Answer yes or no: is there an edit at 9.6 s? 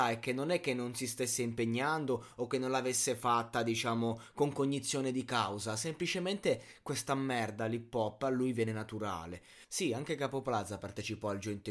yes